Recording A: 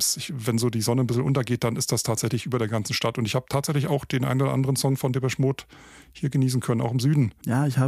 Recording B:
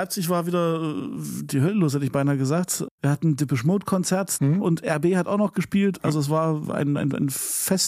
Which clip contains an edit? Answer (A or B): B